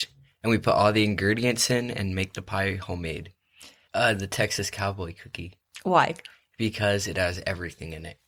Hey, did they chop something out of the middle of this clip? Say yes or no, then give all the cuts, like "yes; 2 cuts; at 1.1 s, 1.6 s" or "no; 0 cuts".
yes; 1 cut; at 3.9 s